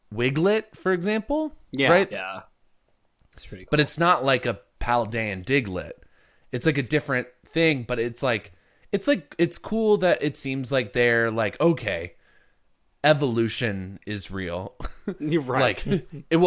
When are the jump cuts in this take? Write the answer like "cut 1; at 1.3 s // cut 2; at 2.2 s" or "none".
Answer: cut 1; at 2.1 s